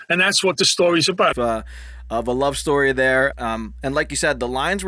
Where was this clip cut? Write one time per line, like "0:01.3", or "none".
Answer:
0:01.3
0:03.3